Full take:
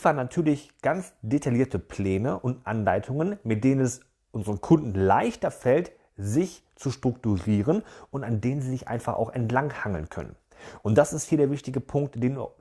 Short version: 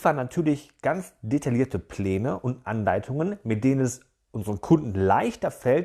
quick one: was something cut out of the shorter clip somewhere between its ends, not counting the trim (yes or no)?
no